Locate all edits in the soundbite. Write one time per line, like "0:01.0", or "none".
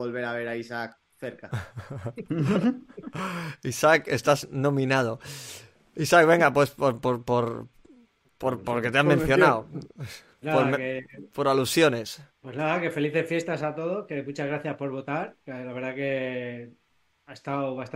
0:12.3

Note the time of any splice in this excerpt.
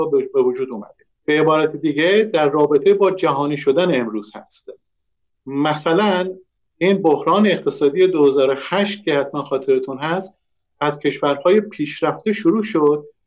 0:01.1

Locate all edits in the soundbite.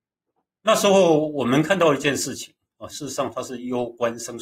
0:02.9

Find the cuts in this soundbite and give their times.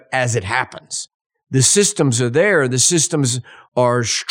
0:01.3

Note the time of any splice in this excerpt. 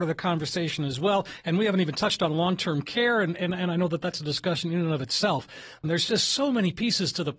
0:05.8

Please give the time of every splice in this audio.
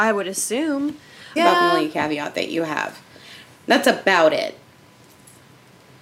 0:01.4

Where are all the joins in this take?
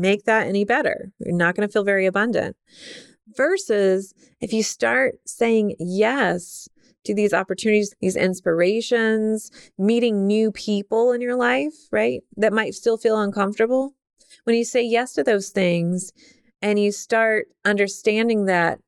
0:07.9

